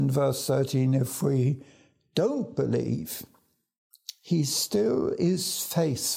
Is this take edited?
no; 0 cuts

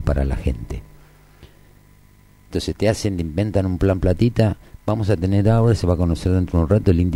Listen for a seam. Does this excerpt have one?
no; 0 cuts

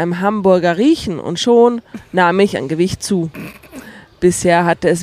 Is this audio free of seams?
yes; 0 cuts

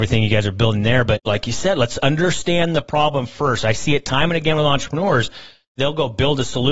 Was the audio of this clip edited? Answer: no; 0 cuts

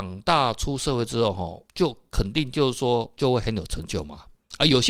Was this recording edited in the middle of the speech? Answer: yes; 2 cuts; at 1.7 s, 3.1 s

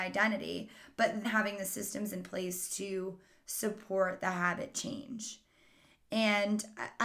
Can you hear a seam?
yes; 1 cut; at 1.2 s

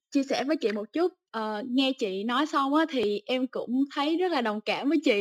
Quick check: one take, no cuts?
yes; 0 cuts

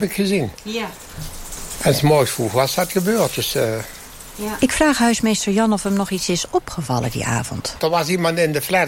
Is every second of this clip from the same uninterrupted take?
no; 1 cut; at 7.8 s

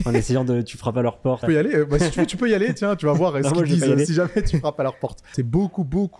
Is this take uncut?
no; 1 cut; at 1.4 s

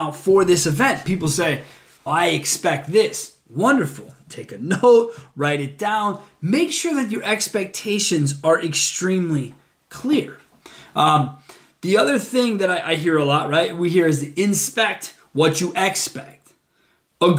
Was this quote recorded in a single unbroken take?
no; 1 cut; at 2.1 s

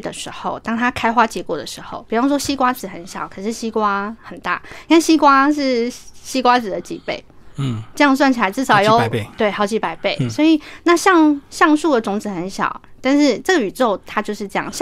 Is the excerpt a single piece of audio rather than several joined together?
yes; 0 cuts

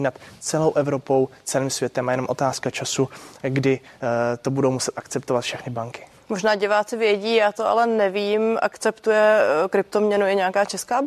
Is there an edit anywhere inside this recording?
no; 0 cuts

